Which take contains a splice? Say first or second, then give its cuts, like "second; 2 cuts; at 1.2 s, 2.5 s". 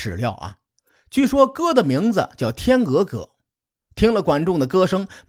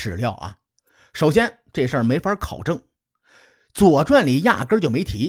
first; 1 cut; at 1.0 s